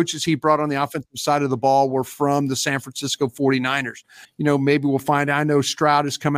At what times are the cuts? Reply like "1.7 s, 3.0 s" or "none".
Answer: 4.2 s